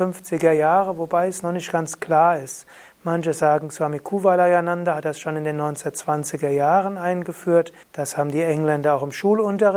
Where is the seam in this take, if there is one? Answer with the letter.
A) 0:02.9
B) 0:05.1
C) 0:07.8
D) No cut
C